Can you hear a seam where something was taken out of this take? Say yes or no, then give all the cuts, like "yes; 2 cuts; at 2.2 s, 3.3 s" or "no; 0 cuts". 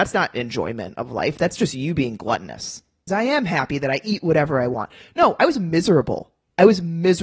yes; 1 cut; at 3.1 s